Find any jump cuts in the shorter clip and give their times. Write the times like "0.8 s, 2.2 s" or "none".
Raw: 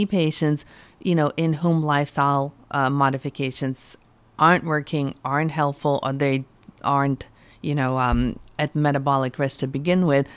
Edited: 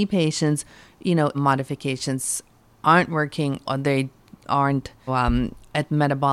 1.3 s, 3.6 s, 5.1 s

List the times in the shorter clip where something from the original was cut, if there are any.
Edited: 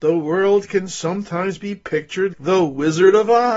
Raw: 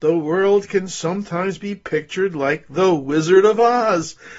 2.3 s

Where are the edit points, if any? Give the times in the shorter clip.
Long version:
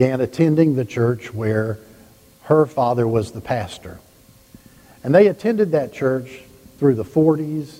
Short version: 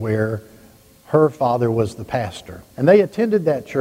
2.7 s

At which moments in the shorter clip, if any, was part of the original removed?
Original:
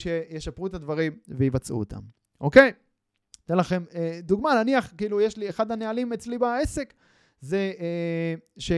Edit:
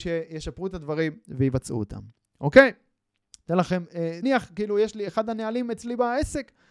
4.2 s

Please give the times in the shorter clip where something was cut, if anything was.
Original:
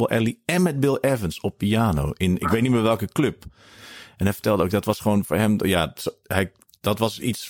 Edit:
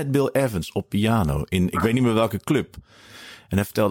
none

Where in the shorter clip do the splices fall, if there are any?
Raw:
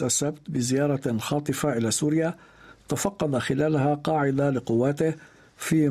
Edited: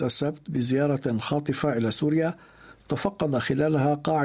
none

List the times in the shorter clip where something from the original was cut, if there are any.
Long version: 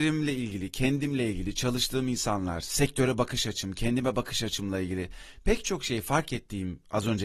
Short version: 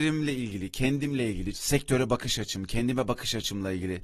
1.5 s

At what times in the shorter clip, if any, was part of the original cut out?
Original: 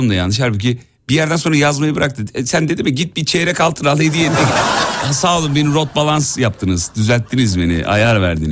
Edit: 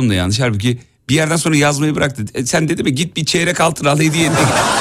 none

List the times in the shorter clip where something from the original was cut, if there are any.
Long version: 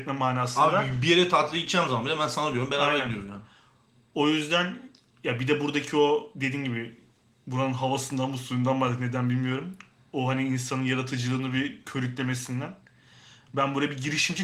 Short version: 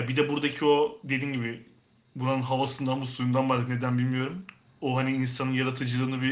none

